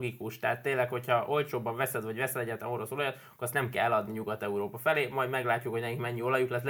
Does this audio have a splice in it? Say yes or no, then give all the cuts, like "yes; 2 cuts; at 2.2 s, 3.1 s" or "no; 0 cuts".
no; 0 cuts